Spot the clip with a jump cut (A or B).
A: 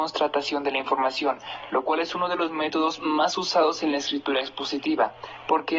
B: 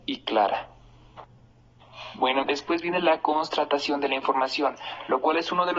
B